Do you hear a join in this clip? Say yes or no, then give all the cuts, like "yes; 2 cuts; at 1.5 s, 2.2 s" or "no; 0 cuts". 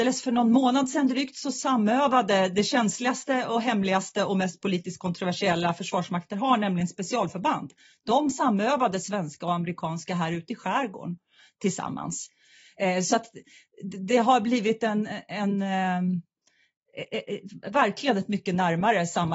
no; 0 cuts